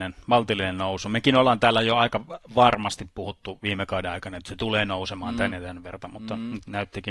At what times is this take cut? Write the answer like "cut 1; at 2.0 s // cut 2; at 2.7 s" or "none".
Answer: none